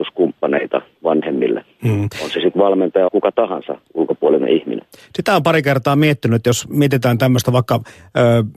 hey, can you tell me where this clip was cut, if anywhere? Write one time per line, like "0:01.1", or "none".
0:03.1